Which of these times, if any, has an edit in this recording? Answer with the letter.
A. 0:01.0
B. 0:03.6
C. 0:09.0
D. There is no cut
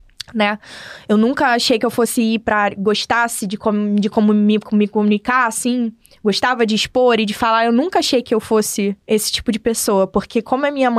C